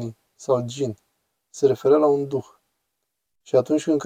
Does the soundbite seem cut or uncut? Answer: uncut